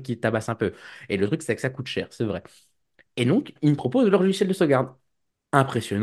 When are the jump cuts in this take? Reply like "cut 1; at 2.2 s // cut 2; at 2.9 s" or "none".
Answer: none